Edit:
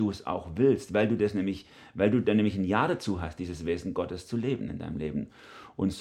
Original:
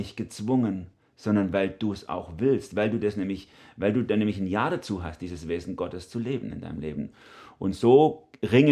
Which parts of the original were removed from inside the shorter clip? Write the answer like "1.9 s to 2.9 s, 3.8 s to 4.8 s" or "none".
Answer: none